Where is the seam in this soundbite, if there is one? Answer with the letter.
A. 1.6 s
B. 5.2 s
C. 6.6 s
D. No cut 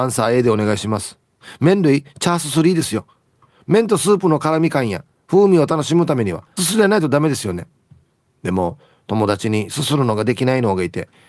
C